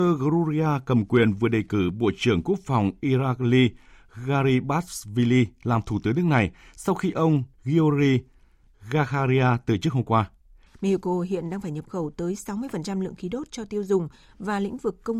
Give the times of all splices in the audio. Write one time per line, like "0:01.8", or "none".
0:07.5
0:10.7